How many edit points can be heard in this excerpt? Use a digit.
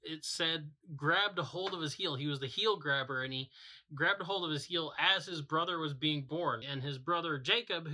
1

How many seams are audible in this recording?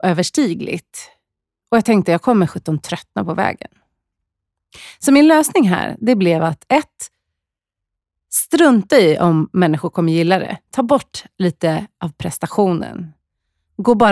0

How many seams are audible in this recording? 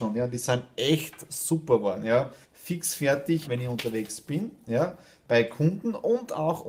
2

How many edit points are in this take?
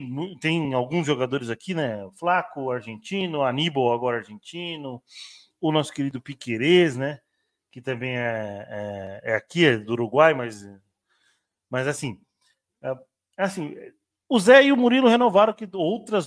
0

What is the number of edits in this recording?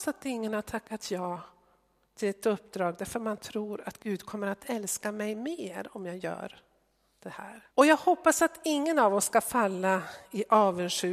1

